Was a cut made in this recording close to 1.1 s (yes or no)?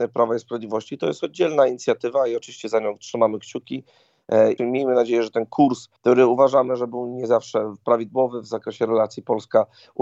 no